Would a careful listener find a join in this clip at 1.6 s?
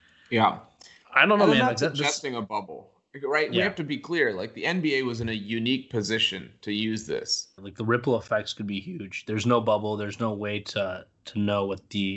no; 1 cut; at 7.6 s

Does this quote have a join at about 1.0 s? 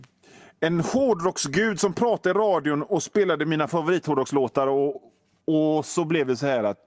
no; 1 cut; at 4.9 s

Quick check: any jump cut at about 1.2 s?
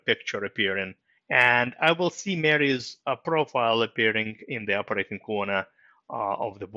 yes; 1 cut; at 1.2 s

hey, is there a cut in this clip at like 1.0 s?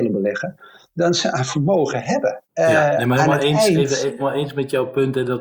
no; 2 cuts; at 2.4 s, 4.2 s

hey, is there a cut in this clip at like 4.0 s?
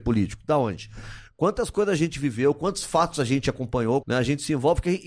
yes; 1 cut; at 4.0 s

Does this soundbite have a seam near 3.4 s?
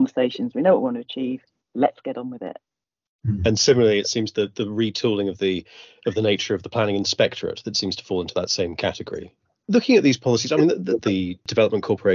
no; 1 cut; at 11.0 s

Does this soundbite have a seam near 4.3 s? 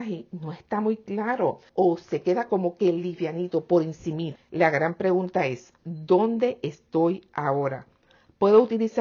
yes; 2 cuts; at 1.7 s, 4.3 s

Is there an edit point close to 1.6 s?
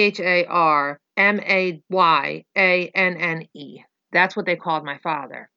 no; 1 cut; at 4.0 s

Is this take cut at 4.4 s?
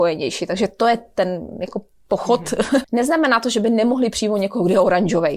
no; 1 cut; at 2.8 s

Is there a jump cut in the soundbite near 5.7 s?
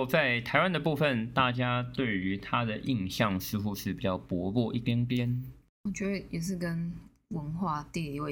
no; 0 cuts

